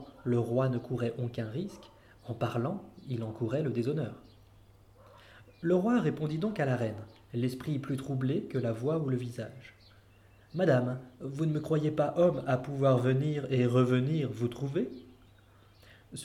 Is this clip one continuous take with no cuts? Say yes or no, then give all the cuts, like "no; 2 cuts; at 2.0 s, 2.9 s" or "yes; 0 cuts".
yes; 0 cuts